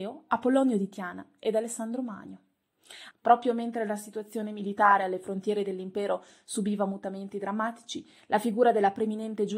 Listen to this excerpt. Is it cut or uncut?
cut